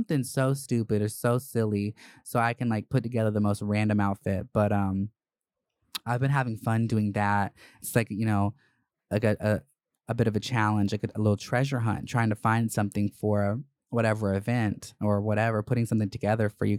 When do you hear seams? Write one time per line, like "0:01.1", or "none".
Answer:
none